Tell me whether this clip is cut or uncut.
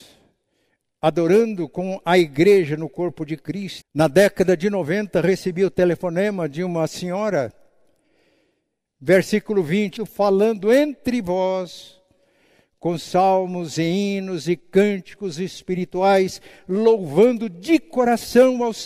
cut